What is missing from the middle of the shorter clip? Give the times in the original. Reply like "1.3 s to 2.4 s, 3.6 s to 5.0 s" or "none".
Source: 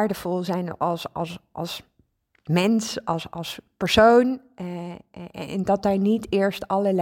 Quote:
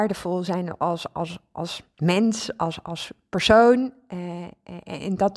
1.9 s to 2.4 s